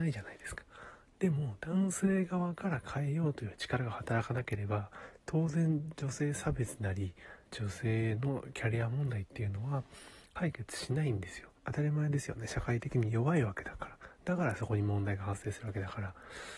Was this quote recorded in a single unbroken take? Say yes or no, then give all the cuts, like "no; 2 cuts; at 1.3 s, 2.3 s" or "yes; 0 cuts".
no; 2 cuts; at 7.4 s, 11.6 s